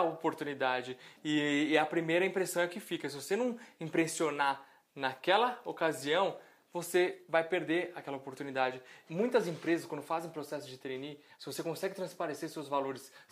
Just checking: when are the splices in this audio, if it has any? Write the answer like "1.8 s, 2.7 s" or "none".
9.1 s, 11.3 s